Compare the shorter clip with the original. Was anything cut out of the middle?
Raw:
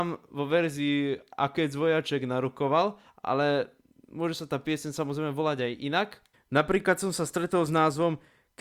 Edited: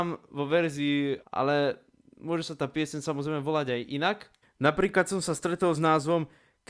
yes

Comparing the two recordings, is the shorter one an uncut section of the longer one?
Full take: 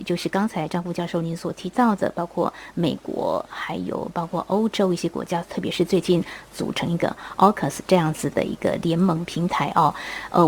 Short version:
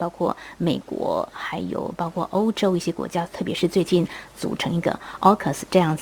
yes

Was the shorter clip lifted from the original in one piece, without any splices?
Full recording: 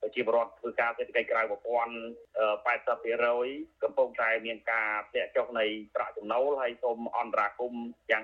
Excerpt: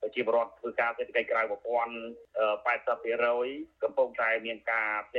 yes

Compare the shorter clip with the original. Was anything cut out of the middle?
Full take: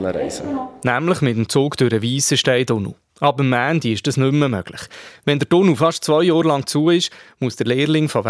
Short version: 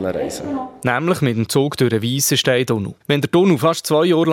yes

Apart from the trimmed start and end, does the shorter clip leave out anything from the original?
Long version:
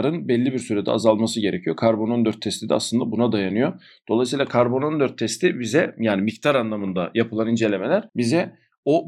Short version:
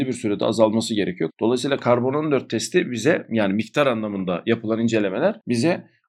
yes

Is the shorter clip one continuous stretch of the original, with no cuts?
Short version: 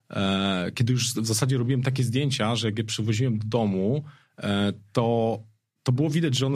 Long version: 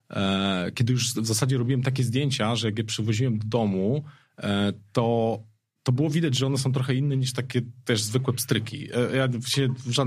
yes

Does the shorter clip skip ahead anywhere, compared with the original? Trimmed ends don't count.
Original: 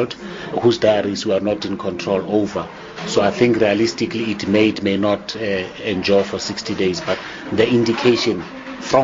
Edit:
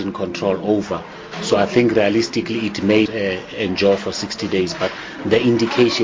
yes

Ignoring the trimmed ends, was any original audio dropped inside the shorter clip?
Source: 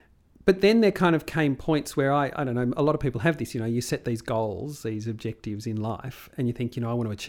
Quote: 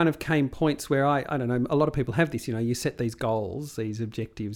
no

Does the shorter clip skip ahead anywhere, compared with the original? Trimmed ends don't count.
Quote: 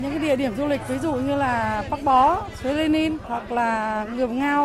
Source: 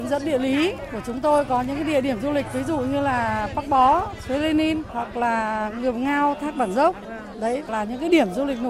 no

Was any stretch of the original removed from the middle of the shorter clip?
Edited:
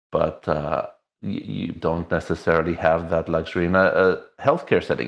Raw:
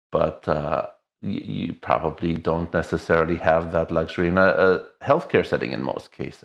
yes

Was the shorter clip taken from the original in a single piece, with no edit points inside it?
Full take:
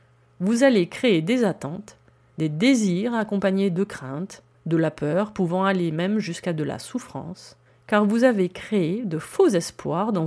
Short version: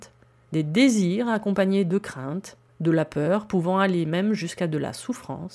yes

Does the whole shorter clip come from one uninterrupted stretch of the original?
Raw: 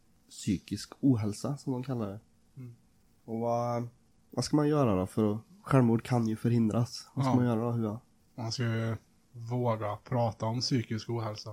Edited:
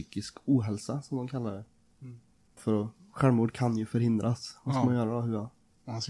no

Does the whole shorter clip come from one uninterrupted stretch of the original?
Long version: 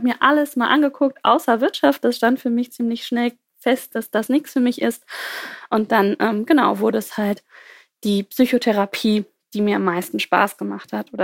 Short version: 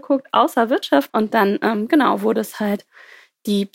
no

